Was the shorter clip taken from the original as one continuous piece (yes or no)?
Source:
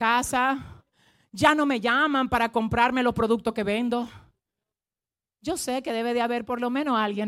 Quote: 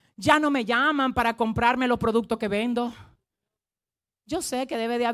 yes